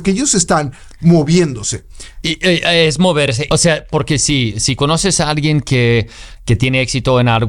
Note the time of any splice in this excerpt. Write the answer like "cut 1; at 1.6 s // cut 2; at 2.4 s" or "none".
cut 1; at 2.2 s // cut 2; at 3.5 s